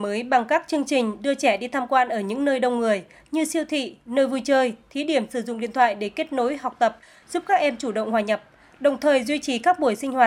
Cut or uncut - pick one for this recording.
uncut